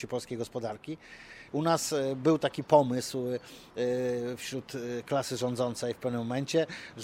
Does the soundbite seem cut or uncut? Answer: cut